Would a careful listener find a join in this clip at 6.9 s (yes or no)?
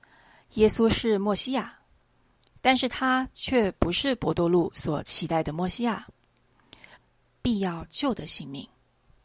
yes